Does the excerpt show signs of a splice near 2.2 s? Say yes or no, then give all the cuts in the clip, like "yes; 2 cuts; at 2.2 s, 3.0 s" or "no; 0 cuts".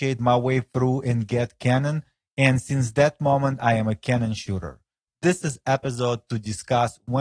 no; 1 cut; at 5.1 s